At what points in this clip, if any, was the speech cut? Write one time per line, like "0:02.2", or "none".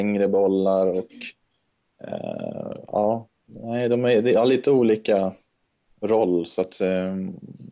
none